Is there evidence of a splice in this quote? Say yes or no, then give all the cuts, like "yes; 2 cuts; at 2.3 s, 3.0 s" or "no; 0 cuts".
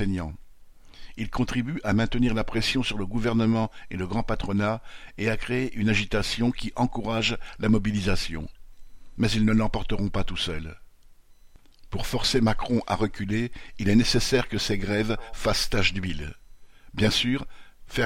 no; 0 cuts